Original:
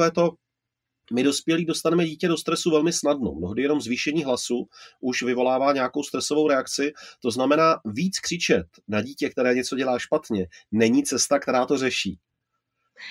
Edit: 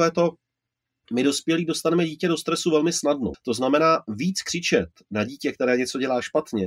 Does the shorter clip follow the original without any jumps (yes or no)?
no